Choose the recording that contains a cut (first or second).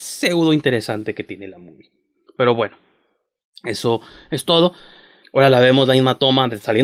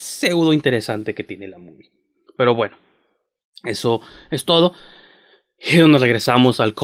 first